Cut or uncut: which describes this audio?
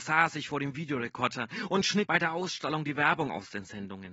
cut